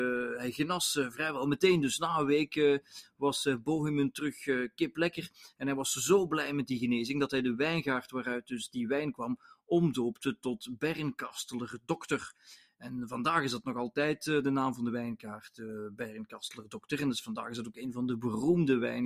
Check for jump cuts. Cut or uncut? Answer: uncut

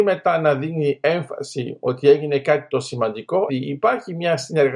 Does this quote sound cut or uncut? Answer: cut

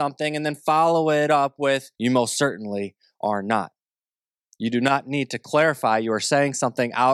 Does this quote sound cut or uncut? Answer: cut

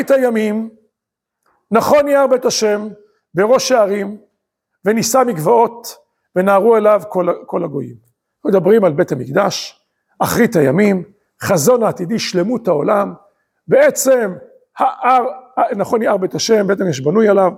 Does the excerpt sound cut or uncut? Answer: uncut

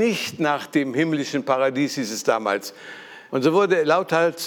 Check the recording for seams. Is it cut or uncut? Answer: cut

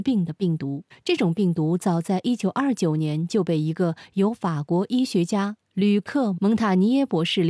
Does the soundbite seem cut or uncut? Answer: cut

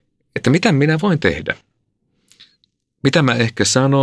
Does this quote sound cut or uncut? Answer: uncut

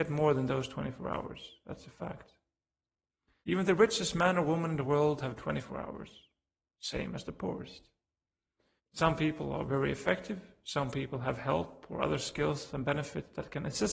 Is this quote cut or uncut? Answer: cut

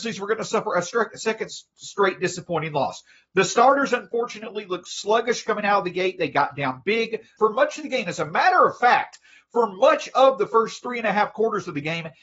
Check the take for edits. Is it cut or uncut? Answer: cut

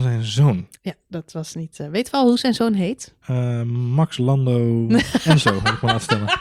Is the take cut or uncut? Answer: uncut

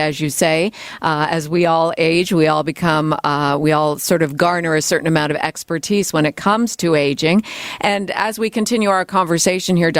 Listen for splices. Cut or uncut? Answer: uncut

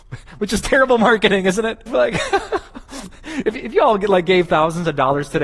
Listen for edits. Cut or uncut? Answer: cut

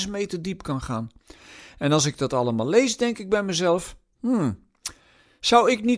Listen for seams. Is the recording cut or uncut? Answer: uncut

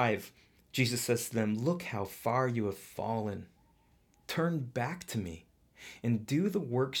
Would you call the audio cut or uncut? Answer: uncut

